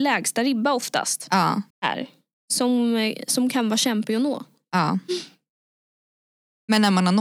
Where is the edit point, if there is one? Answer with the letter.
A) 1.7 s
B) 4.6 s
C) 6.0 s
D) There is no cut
A